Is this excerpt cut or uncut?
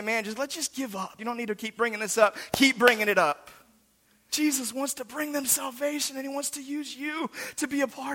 cut